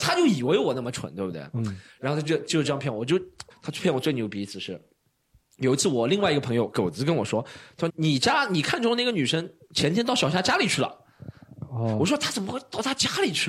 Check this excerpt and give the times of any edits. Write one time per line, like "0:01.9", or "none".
0:03.5
0:07.9